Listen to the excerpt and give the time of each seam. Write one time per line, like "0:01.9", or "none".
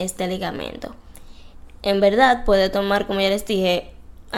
none